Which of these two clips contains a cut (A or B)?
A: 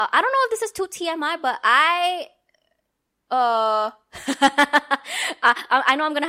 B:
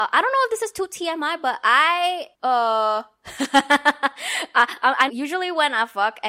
B